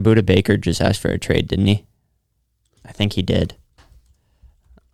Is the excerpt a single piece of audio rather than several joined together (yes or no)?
no